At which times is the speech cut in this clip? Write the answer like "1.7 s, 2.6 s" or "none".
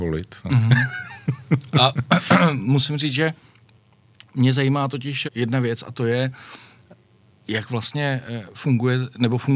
5.2 s